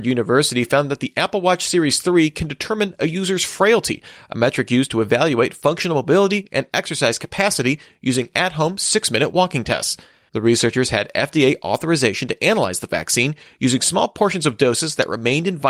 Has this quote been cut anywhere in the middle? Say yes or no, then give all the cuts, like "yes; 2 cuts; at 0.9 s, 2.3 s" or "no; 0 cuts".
yes; 1 cut; at 10.3 s